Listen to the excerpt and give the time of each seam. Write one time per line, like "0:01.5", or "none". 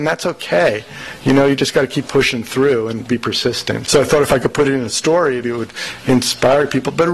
0:03.8
0:05.4